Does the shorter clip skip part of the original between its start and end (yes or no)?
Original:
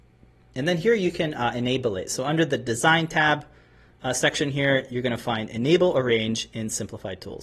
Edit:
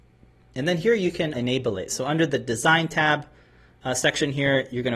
yes